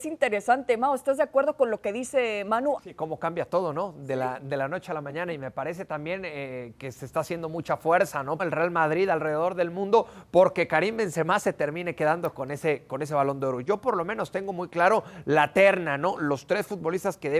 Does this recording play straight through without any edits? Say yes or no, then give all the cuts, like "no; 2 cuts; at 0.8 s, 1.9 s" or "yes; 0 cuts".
no; 2 cuts; at 2.8 s, 8.4 s